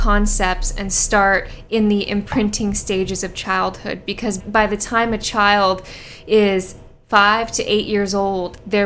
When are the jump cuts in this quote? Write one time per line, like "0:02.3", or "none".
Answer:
0:04.4

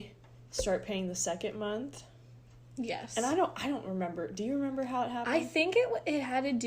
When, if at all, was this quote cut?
none

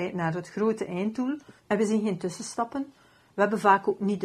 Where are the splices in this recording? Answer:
0:01.6

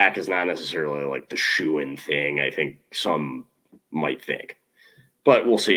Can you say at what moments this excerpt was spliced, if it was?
none

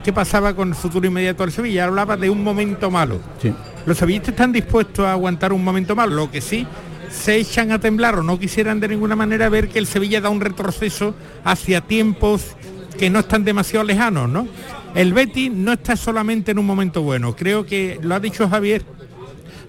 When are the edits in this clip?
0:06.1

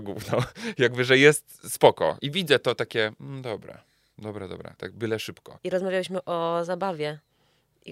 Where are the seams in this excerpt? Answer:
0:02.2
0:05.6

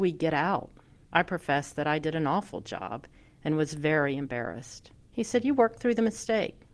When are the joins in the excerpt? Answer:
0:01.0
0:05.0

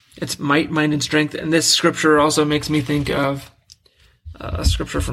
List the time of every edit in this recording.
none

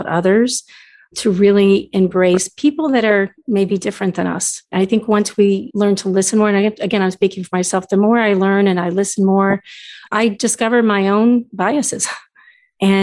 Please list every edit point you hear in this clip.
none

